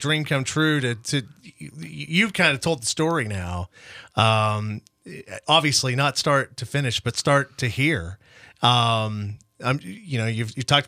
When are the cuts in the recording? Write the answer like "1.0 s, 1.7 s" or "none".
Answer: none